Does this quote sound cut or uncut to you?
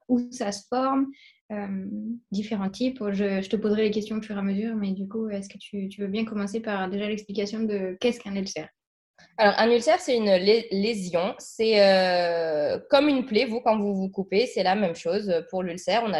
uncut